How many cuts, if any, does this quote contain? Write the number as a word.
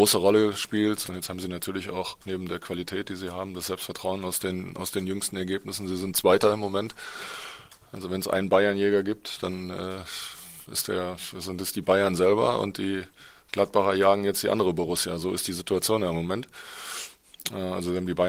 one